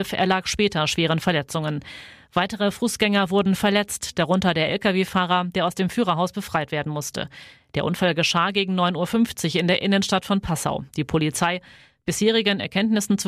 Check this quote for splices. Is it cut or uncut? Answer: uncut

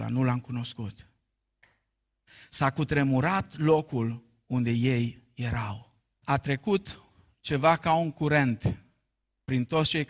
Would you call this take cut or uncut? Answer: cut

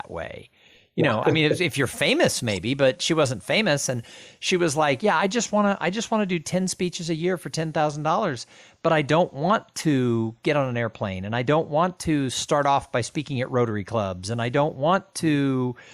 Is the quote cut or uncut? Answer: cut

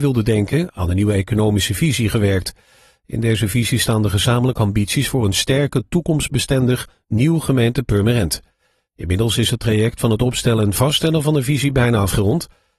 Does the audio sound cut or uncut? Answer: uncut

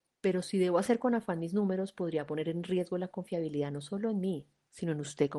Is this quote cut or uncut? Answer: uncut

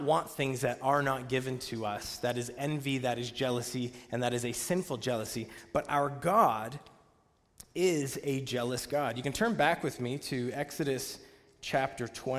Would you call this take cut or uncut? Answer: uncut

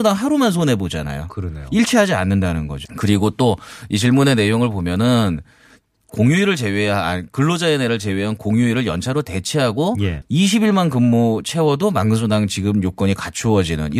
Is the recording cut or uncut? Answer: cut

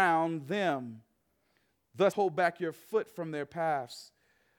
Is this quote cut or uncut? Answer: cut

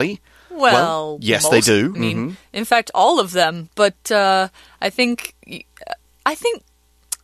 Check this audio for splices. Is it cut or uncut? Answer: cut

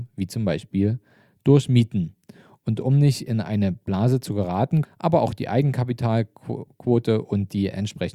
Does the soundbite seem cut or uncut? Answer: cut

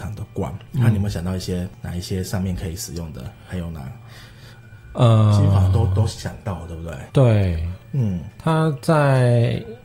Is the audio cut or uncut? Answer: cut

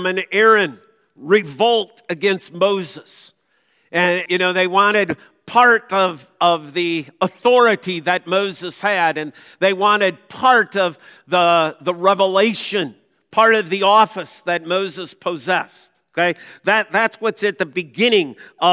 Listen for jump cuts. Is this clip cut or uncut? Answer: cut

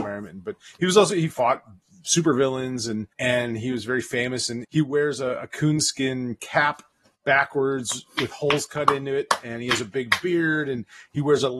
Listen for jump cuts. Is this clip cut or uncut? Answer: cut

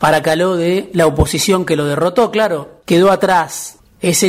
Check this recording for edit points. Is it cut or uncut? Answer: cut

